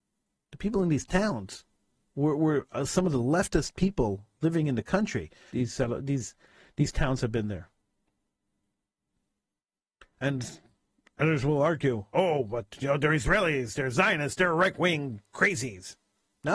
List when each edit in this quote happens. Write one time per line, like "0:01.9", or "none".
0:05.5